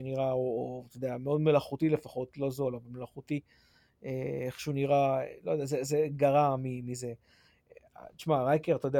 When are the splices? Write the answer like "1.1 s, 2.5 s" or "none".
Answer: none